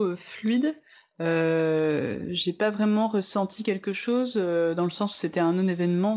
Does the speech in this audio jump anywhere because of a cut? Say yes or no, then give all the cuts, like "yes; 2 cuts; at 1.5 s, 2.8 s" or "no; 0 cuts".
no; 0 cuts